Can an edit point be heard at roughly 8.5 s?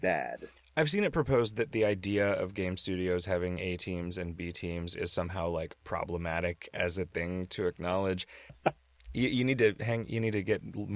yes; 1 cut; at 8.5 s

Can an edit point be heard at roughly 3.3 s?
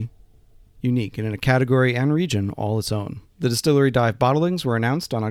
yes; 1 cut; at 3.3 s

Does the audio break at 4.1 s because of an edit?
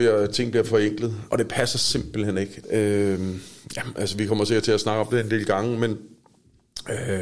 no; 2 cuts; at 1.3 s, 2.6 s

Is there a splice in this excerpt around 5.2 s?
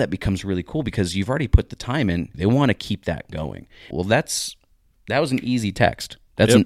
no; 2 cuts; at 2.3 s, 3.9 s

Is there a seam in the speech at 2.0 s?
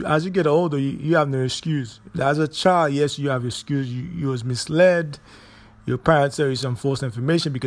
no; 0 cuts

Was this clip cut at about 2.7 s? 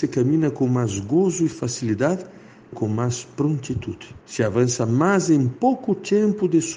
yes; 2 cuts; at 2.7 s, 4.2 s

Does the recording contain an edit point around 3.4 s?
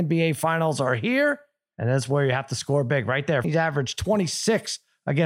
yes; 1 cut; at 3.4 s

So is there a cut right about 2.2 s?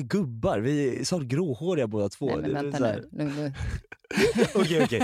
no; 0 cuts

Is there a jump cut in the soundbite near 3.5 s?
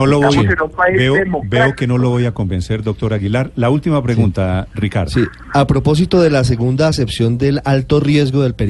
no; 0 cuts

